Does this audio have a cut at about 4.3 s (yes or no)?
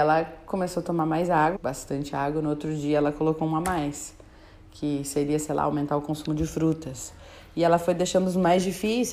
no